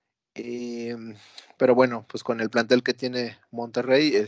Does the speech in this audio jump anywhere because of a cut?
no; 0 cuts

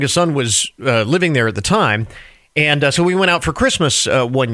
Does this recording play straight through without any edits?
yes; 0 cuts

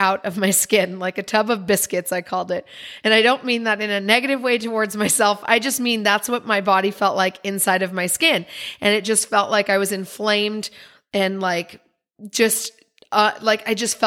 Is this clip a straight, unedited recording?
yes; 0 cuts

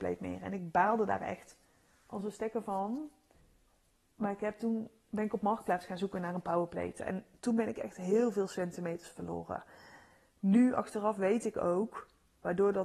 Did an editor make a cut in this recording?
yes; 1 cut; at 7.0 s

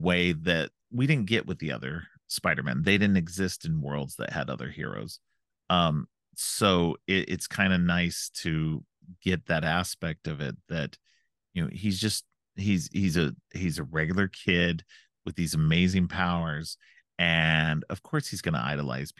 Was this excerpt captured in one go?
yes; 0 cuts

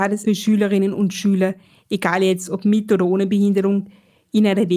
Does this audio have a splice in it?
no; 0 cuts

